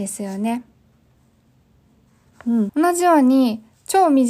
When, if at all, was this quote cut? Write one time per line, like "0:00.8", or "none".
0:02.7